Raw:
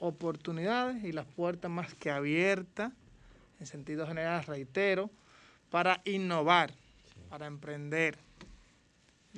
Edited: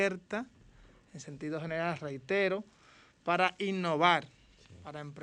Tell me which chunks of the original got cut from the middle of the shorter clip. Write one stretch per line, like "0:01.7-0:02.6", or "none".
none